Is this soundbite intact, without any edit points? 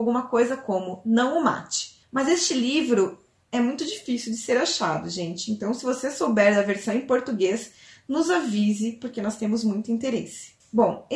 yes; 0 cuts

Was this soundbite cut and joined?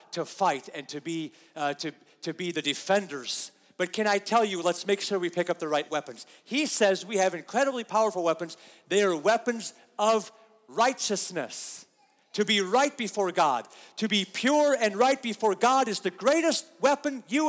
no; 0 cuts

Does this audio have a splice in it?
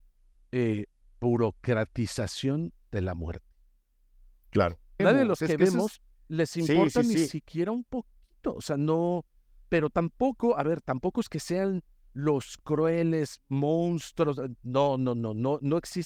yes; 1 cut; at 5.0 s

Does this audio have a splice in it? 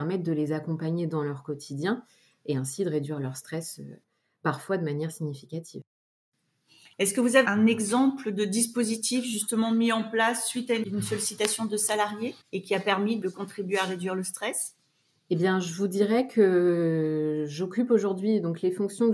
yes; 2 cuts; at 7.4 s, 12.4 s

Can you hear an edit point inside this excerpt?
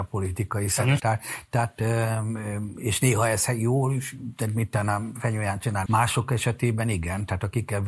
yes; 2 cuts; at 1.0 s, 5.9 s

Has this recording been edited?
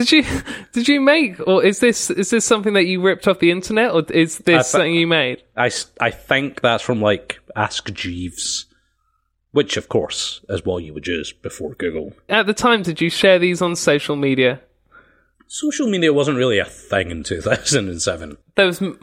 no; 0 cuts

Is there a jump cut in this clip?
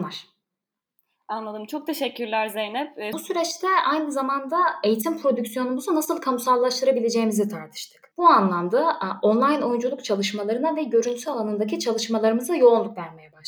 yes; 2 cuts; at 3.1 s, 8.1 s

